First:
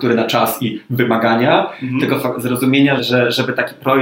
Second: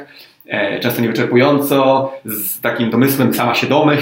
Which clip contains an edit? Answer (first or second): first